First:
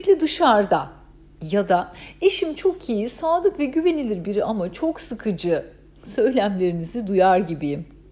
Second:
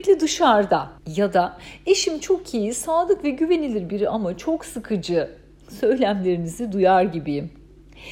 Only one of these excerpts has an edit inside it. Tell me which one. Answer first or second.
second